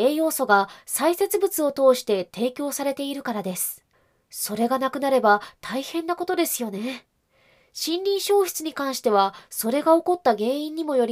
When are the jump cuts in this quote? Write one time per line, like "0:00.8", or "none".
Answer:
none